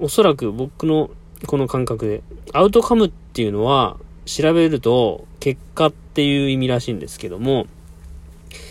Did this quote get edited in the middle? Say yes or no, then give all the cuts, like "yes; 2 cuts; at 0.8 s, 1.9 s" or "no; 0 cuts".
no; 0 cuts